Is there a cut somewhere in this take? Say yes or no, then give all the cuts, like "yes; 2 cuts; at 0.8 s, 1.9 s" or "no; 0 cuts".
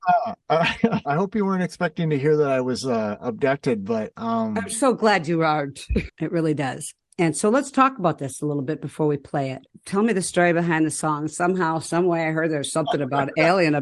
yes; 2 cuts; at 1.0 s, 6.1 s